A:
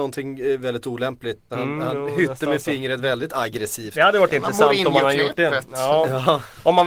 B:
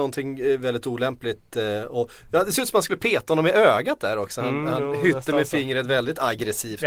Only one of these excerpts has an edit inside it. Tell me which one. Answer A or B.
A